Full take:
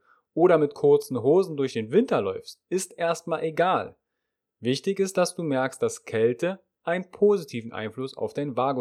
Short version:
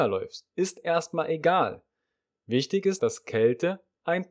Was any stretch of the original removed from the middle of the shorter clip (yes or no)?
yes